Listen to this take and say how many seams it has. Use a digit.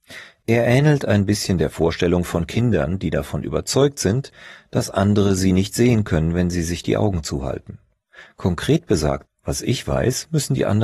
1